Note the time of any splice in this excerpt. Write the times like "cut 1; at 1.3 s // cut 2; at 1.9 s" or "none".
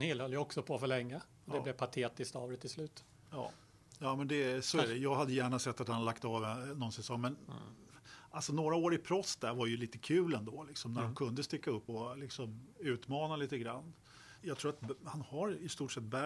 cut 1; at 11.9 s // cut 2; at 14.4 s